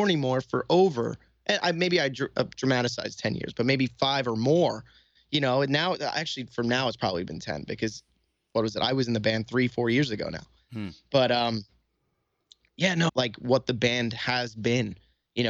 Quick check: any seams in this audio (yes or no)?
yes